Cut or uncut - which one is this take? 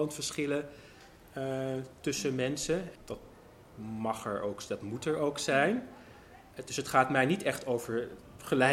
cut